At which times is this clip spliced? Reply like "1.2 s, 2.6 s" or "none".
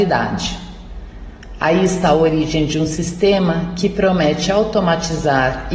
none

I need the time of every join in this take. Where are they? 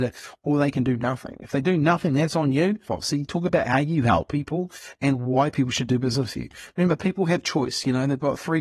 2.9 s

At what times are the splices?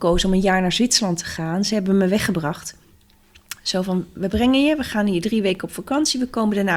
none

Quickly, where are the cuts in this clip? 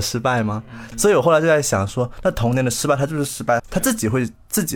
0.9 s, 3.6 s

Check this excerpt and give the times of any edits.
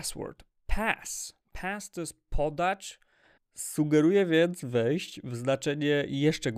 1.4 s, 3.4 s

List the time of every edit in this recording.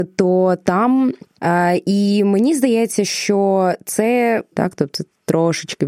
1.4 s, 4.5 s

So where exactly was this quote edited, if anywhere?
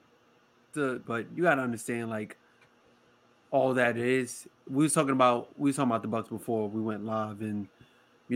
1.0 s

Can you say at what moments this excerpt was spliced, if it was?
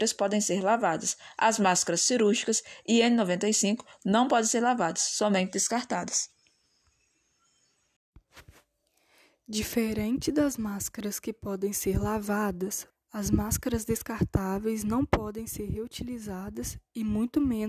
12.9 s

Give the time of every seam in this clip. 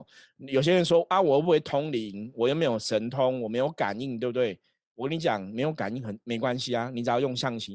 none

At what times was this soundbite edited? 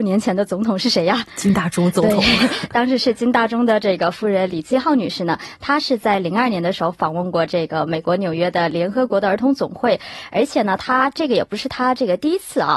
none

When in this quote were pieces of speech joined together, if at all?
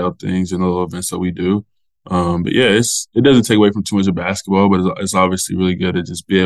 none

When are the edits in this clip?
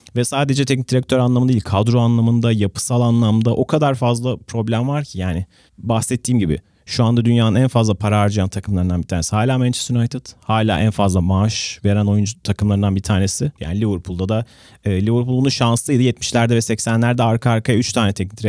13.6 s

